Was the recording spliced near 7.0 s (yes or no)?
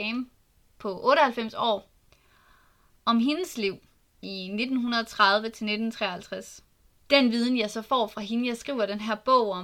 yes